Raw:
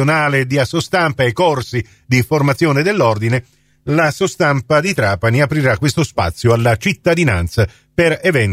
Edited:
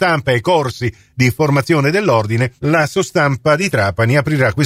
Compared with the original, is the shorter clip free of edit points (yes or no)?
no